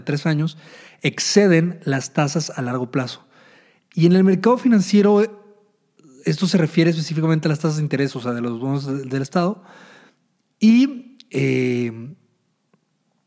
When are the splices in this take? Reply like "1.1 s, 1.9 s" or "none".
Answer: none

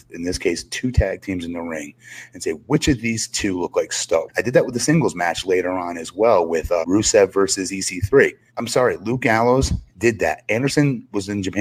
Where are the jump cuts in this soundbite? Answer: 4.3 s, 6.8 s, 8.5 s

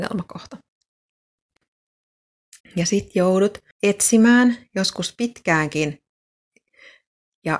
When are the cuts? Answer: 2.6 s, 3.7 s

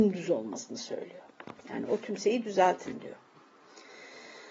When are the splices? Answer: none

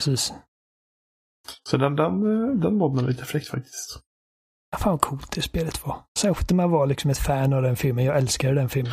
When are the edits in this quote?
none

